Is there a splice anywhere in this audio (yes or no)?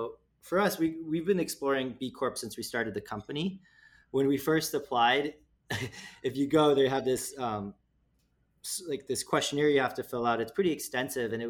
no